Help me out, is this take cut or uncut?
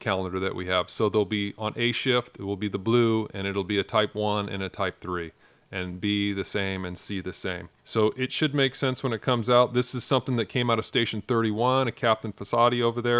cut